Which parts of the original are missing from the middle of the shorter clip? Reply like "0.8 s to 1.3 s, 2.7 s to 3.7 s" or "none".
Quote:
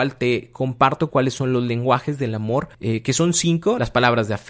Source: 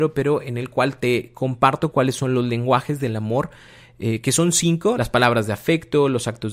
3.6 s to 3.9 s